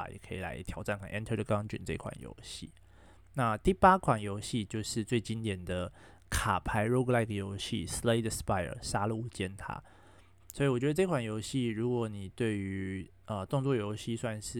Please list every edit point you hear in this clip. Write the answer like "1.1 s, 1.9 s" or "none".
1.0 s, 10.4 s

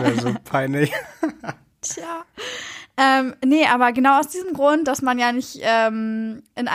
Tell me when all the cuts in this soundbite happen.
none

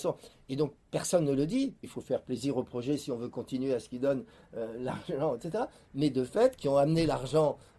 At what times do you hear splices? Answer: 1.8 s, 6.6 s

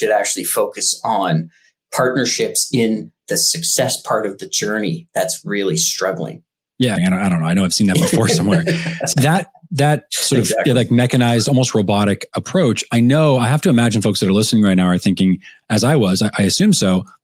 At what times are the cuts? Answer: 7.0 s, 9.1 s

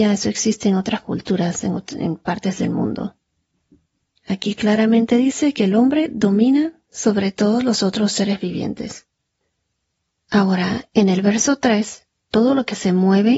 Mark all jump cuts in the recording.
12.2 s

